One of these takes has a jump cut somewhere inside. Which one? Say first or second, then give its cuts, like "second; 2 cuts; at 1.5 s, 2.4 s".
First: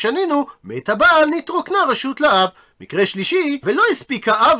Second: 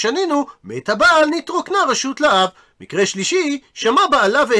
first; 1 cut; at 3.6 s